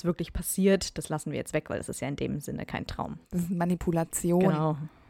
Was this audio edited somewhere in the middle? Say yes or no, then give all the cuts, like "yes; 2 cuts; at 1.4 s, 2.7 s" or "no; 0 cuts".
yes; 1 cut; at 3.2 s